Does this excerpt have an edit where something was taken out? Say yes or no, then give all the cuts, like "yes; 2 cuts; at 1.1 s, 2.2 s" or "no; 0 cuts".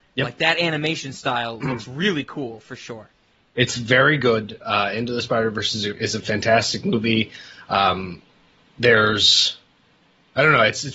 no; 0 cuts